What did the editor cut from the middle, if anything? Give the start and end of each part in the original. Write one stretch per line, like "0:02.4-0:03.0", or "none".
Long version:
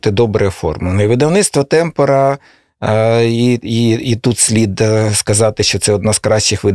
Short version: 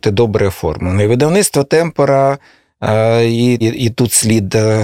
0:03.6-0:03.9

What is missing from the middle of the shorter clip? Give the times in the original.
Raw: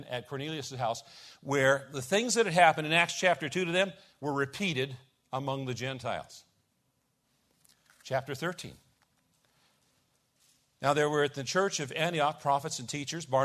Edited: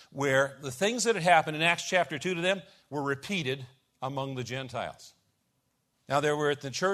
0:07.3-0:10.7

